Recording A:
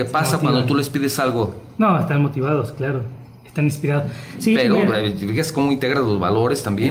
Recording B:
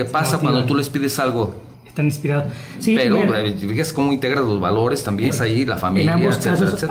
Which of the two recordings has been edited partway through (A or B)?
B